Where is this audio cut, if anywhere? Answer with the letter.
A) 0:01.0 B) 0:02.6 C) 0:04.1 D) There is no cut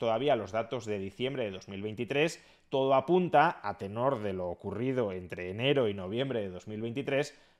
D